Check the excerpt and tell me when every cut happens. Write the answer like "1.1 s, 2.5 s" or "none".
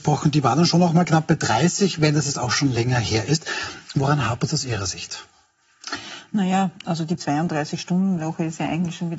none